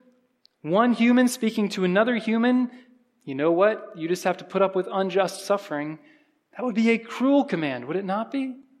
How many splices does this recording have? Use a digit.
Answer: 0